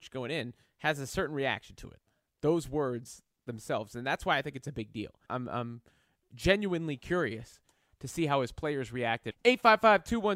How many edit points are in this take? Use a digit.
2